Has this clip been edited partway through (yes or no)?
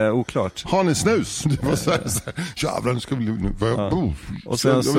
yes